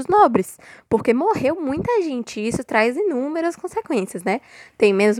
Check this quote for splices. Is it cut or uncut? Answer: uncut